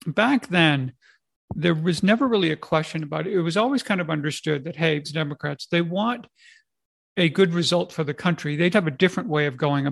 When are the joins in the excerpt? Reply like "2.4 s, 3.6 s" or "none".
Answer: 5.0 s, 8.7 s